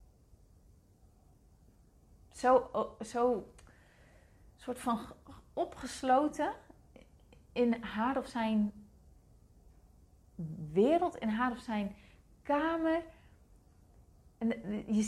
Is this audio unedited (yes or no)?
yes